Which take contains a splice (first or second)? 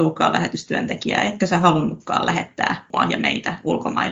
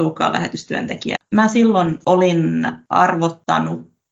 second